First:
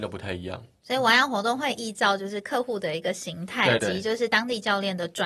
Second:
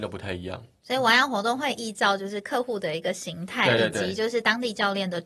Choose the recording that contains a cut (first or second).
first